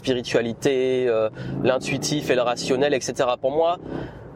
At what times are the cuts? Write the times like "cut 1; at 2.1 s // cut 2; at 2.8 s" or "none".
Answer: none

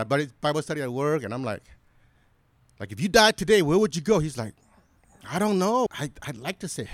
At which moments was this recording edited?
cut 1; at 5.9 s

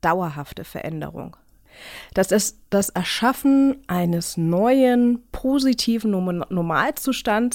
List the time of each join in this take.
none

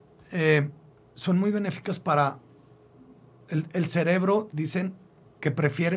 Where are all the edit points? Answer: none

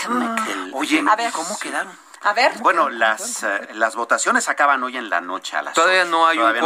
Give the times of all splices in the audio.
cut 1; at 2.6 s // cut 2; at 3.6 s

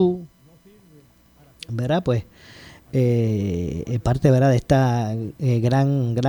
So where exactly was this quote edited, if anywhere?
none

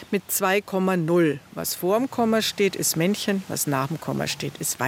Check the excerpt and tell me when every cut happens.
none

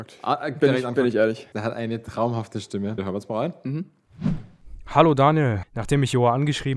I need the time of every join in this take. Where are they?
cut 1; at 1.5 s // cut 2; at 3.0 s // cut 3; at 5.6 s

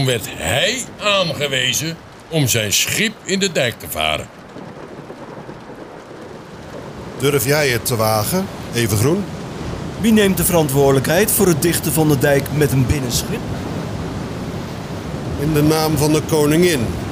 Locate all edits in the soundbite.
none

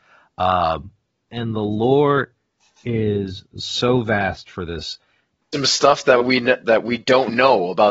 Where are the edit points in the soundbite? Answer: cut 1; at 1.3 s // cut 2; at 5.5 s

